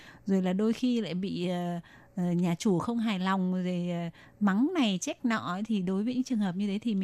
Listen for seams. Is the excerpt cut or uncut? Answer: uncut